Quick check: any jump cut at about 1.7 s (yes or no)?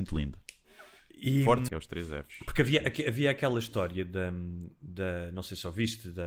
yes